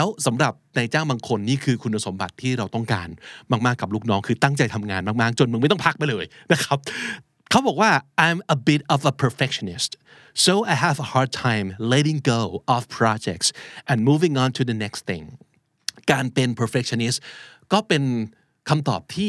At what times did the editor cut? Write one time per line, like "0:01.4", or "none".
none